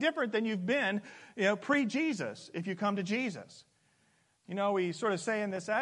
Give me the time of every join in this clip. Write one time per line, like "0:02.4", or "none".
0:04.4